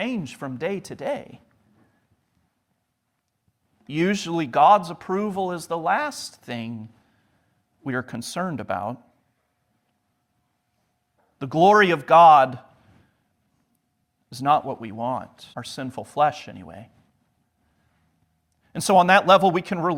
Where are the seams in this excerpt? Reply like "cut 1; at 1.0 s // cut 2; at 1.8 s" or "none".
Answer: cut 1; at 15.5 s